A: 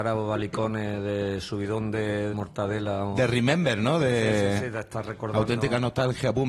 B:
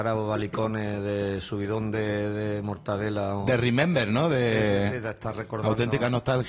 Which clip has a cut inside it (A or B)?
A